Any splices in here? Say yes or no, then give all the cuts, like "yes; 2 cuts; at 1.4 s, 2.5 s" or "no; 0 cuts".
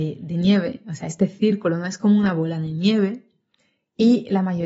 no; 0 cuts